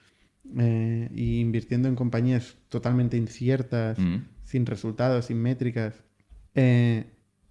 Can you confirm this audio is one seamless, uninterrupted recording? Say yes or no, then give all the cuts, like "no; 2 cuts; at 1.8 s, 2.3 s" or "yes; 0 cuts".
no; 1 cut; at 6.5 s